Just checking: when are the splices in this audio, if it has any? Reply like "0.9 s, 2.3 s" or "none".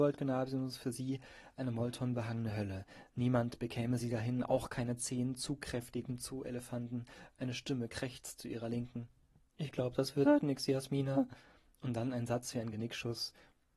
none